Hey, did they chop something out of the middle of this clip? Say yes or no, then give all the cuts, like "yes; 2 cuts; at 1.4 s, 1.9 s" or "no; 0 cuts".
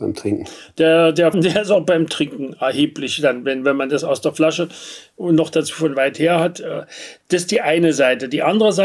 yes; 1 cut; at 1.3 s